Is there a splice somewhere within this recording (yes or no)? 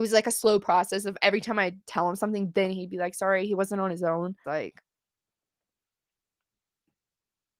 yes